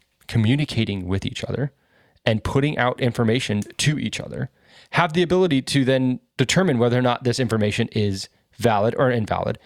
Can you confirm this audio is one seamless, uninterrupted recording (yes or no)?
no